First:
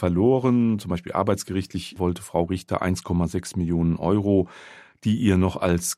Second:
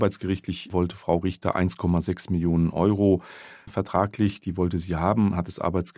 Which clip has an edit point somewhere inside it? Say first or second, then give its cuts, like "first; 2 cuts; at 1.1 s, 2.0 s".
second; 1 cut; at 3.7 s